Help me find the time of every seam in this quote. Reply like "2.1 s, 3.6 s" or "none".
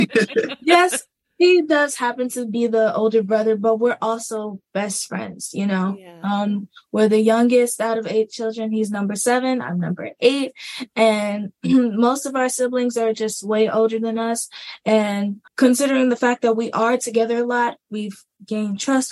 15.5 s

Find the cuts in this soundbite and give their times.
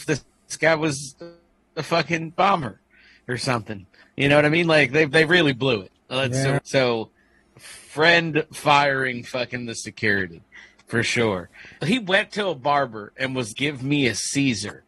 6.6 s, 11.8 s, 13.5 s

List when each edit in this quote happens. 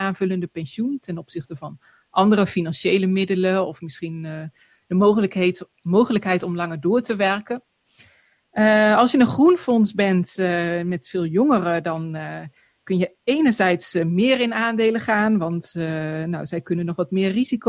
none

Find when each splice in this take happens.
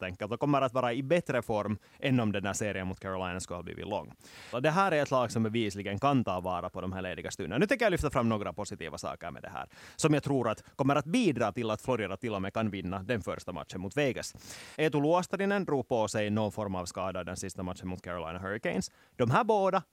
4.5 s, 14.7 s

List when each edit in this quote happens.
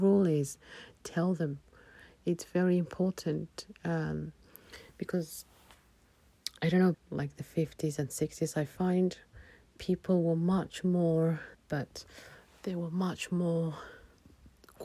6.9 s, 11.5 s

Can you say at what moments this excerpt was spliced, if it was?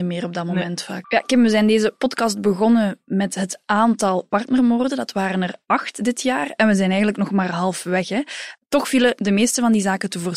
1.0 s

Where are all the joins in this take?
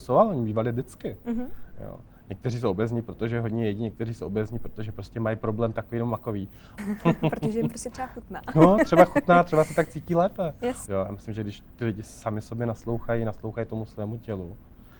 6.8 s, 10.9 s

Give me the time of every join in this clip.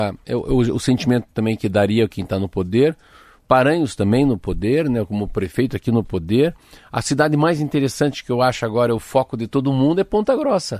none

